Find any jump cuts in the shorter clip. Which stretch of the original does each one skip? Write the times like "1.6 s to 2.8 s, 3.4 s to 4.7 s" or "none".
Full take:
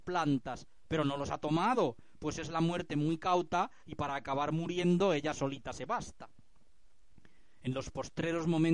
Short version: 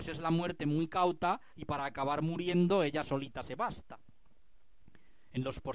none